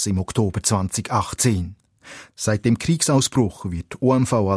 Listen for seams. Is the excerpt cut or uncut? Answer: cut